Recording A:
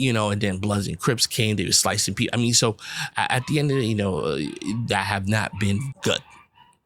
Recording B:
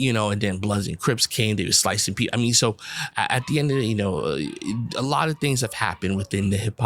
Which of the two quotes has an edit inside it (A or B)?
A